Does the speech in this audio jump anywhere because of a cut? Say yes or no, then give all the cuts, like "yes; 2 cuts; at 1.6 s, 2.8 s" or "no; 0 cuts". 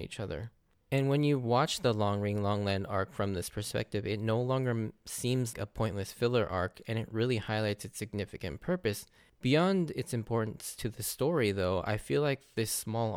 yes; 1 cut; at 5.5 s